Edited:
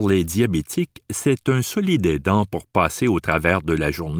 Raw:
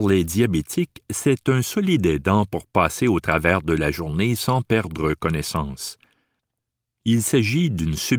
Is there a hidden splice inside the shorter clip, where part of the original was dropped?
no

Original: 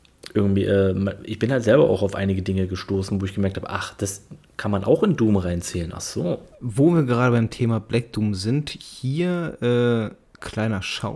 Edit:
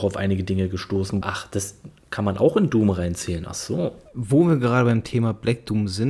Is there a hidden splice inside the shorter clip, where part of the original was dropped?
yes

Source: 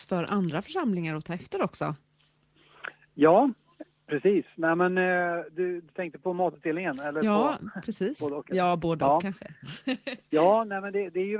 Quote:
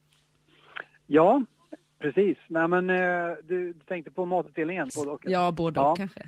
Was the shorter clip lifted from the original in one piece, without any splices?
no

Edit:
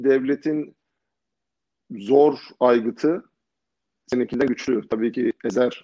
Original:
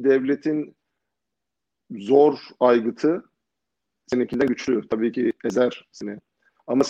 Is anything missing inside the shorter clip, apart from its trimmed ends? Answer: no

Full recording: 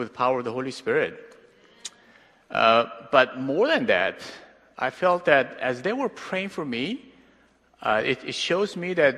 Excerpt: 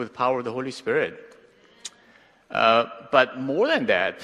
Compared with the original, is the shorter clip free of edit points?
yes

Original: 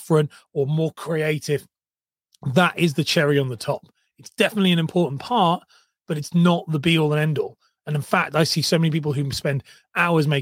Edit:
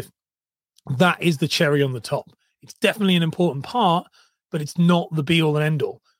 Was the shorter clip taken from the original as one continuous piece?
yes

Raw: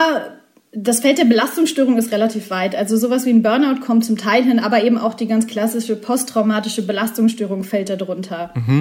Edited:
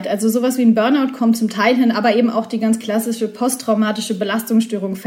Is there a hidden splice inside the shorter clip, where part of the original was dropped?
no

